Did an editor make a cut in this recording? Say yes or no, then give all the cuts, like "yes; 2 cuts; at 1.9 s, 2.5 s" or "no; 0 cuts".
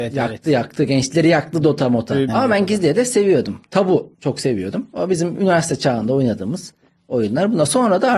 yes; 2 cuts; at 2.3 s, 4.1 s